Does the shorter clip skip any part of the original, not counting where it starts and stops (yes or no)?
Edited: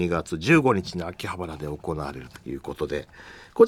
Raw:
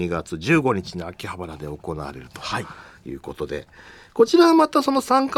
yes